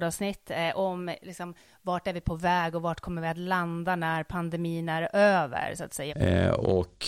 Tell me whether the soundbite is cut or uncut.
cut